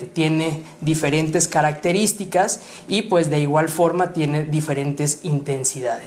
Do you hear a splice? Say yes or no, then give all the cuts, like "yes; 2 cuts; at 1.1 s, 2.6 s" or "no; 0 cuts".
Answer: no; 0 cuts